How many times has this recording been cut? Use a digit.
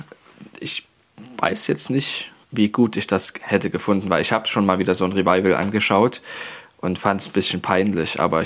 1